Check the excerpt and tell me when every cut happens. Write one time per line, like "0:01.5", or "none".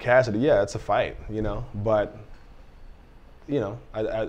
none